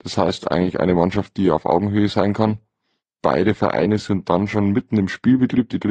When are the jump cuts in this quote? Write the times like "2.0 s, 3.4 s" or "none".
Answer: none